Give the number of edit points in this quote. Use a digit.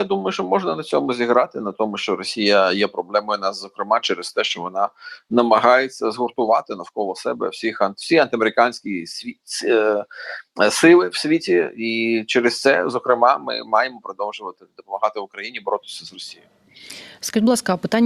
0